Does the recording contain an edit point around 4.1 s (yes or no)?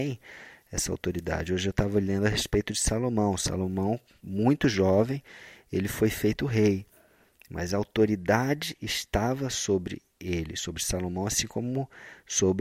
no